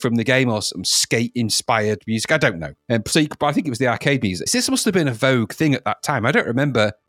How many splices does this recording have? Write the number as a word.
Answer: one